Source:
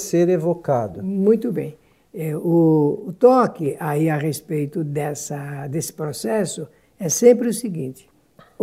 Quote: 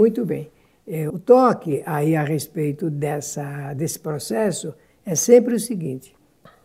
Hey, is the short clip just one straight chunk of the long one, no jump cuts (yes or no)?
no